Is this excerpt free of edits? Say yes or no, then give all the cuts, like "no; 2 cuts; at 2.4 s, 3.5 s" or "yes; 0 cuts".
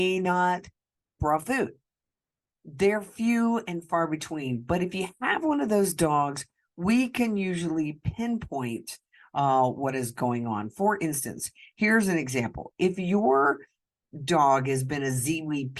no; 1 cut; at 1.2 s